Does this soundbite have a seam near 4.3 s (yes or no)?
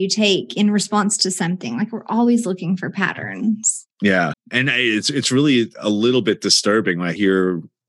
yes